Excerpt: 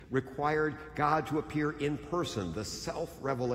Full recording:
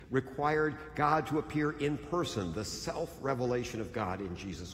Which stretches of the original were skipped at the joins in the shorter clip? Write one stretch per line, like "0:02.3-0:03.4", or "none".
none